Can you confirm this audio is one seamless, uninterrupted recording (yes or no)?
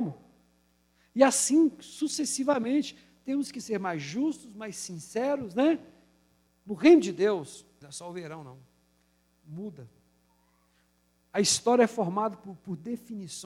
no